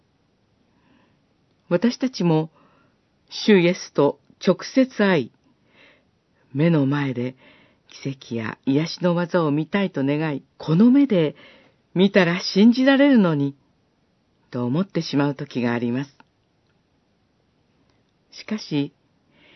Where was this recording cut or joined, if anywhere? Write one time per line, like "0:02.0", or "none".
0:10.5